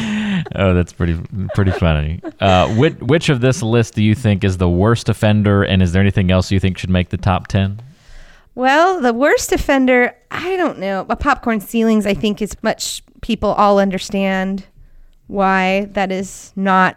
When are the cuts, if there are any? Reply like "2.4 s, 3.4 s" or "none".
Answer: 12.5 s